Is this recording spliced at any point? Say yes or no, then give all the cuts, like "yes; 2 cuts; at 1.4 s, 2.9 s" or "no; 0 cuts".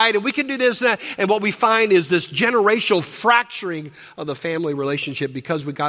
no; 0 cuts